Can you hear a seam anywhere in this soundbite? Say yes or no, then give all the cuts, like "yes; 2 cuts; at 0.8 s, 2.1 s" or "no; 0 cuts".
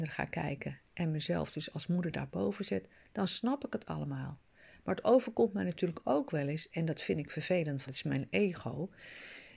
yes; 1 cut; at 7.9 s